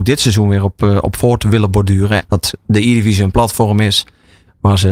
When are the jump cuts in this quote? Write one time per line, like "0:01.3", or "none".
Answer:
0:02.2